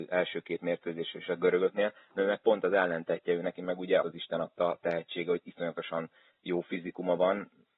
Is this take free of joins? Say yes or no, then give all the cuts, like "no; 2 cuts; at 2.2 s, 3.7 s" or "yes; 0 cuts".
no; 1 cut; at 4.0 s